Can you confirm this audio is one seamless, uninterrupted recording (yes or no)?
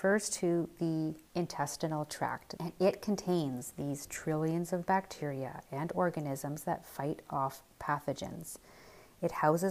no